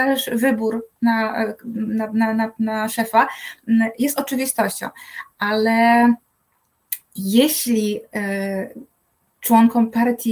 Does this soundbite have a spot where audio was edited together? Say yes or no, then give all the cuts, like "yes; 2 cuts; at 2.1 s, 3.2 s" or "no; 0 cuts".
no; 0 cuts